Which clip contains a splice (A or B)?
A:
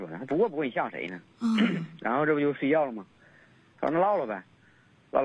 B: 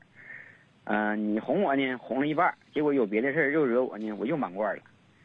A